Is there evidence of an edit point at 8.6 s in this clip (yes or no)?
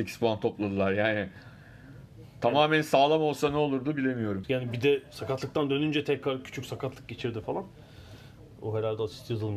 yes